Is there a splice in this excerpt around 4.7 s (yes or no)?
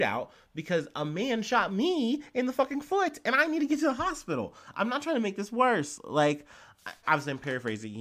no